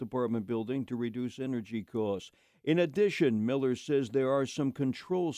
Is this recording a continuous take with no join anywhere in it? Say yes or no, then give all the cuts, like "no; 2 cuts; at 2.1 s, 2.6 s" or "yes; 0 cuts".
yes; 0 cuts